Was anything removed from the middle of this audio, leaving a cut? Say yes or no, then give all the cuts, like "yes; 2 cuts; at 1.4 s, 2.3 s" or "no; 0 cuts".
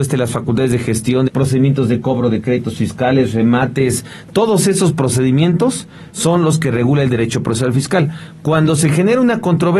yes; 1 cut; at 1.3 s